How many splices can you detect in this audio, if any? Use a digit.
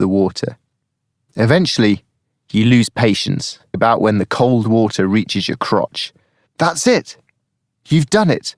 2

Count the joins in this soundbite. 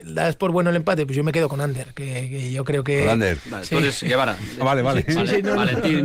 1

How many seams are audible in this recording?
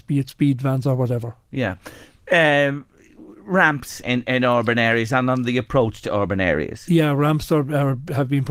1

